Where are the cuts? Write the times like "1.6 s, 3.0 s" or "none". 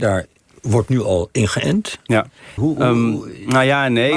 2.6 s